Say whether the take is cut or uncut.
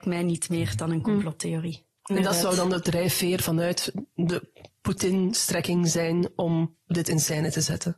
cut